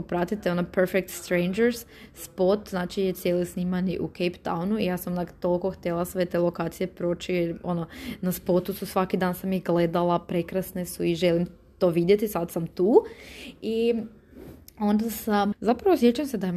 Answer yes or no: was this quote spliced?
yes